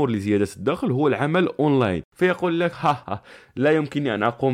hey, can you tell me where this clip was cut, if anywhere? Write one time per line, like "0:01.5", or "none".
0:03.0